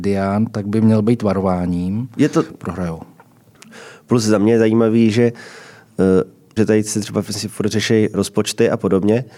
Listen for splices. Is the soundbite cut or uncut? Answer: cut